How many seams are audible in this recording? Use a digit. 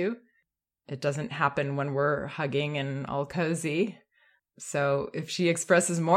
1